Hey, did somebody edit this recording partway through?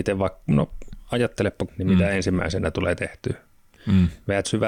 yes; 1 cut; at 1.7 s

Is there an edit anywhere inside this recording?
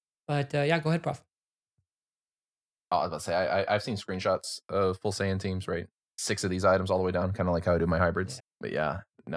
yes; 1 cut; at 8.4 s

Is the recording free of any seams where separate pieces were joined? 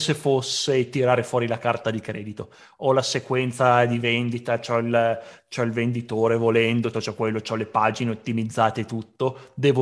no; 1 cut; at 6.9 s

